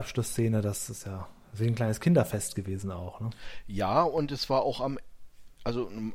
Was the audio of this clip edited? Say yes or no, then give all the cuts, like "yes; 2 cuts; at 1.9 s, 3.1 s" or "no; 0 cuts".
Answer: no; 0 cuts